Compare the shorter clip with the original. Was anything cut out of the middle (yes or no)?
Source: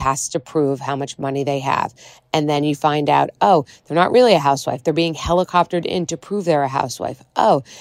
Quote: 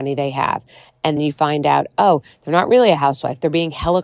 yes